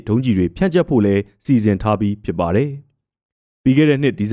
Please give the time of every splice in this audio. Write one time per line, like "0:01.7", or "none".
none